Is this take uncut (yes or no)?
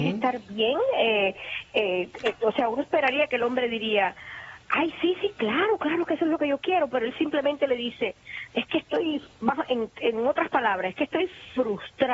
yes